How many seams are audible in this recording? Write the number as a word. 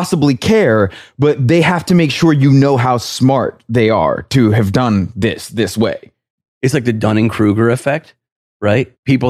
zero